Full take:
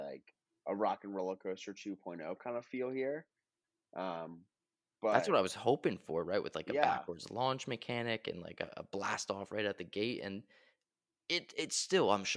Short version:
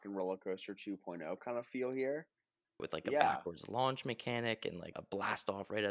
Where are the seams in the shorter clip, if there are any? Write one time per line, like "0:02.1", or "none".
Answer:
0:02.8
0:04.9

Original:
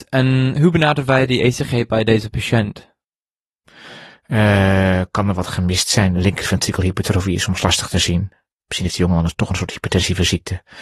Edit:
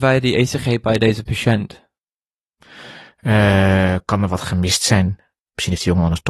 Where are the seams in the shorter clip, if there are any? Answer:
0:05.1

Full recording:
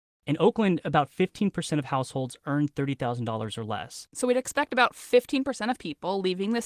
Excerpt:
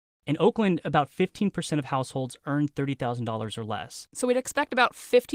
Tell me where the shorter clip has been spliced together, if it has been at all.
none

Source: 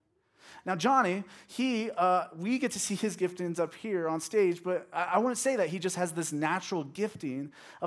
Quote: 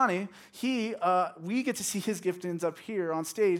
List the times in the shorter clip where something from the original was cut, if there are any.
none

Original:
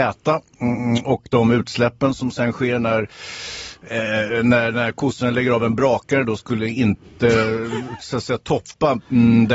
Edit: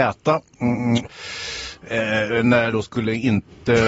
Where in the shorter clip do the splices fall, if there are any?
0:01.0
0:02.7

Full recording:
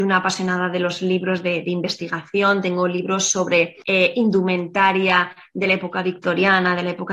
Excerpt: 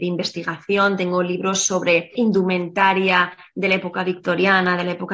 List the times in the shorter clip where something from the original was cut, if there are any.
0:02.2

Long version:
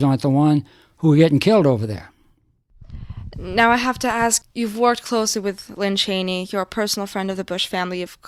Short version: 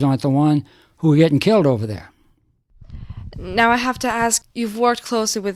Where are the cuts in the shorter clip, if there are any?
none

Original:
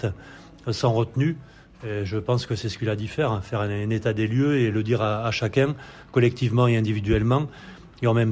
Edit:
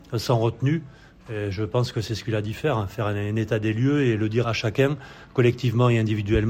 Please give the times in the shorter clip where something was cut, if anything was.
0:04.4

